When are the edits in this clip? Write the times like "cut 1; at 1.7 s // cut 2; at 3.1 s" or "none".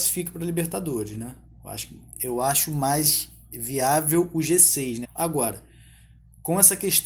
cut 1; at 5.0 s